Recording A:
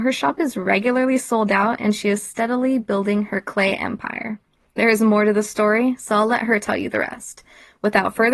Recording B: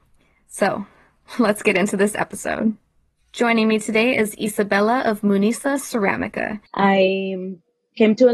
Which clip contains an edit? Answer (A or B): B